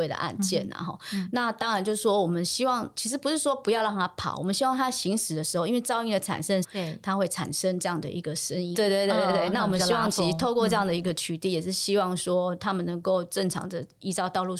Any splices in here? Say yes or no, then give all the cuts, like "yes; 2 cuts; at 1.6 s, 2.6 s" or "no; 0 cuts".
yes; 2 cuts; at 6.6 s, 8.7 s